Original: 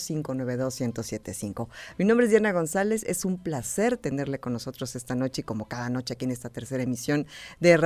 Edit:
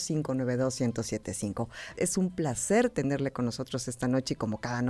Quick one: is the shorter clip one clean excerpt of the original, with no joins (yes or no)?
no